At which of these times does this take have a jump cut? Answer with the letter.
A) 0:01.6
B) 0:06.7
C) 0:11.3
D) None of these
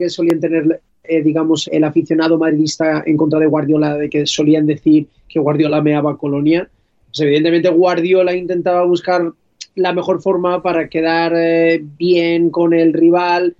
A